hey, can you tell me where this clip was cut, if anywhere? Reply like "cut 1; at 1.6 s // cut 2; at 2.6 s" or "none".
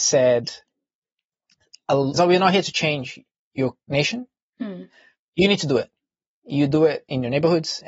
cut 1; at 2.1 s